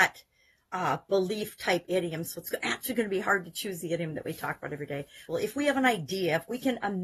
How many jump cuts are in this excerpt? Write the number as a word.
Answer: one